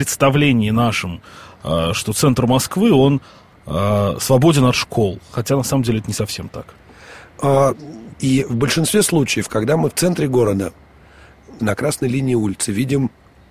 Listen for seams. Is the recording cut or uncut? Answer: cut